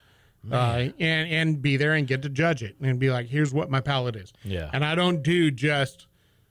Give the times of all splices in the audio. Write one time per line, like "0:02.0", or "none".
none